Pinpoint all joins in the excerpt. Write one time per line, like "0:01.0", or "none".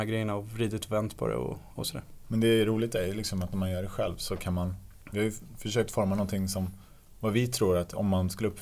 0:01.8

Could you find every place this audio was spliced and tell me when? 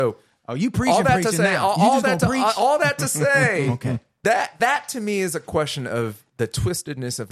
none

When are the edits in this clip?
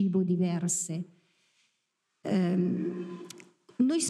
none

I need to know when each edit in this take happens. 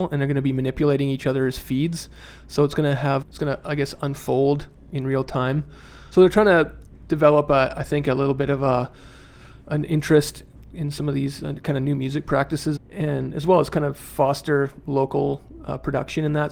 0:03.2
0:06.1
0:12.8

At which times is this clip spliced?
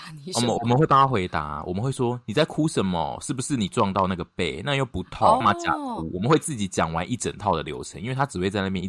0:05.4

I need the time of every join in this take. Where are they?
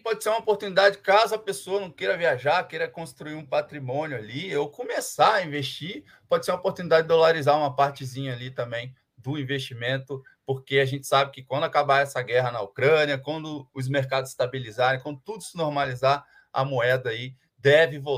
none

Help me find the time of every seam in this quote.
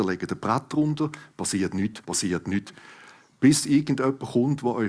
0:02.0

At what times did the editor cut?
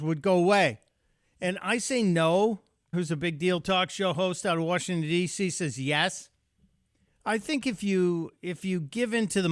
0:02.9

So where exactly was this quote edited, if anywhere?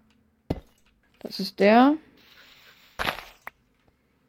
0:01.0

